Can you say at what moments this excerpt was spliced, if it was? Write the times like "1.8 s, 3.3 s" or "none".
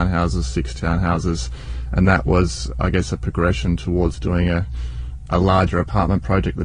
none